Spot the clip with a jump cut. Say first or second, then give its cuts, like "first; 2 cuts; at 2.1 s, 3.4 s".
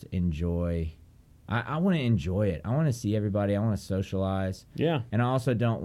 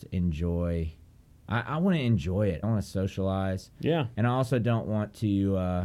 second; 1 cut; at 2.6 s